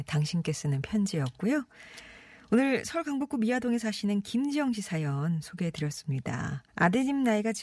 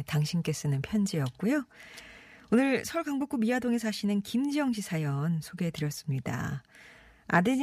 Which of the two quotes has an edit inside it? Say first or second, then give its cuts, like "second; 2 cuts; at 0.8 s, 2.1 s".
first; 1 cut; at 6.7 s